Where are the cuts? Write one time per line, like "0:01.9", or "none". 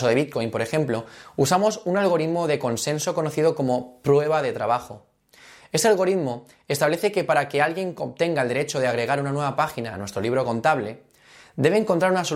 none

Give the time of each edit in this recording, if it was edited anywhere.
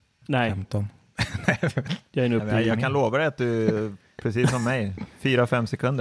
none

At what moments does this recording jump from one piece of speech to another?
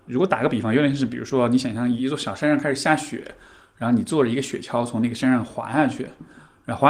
0:02.0

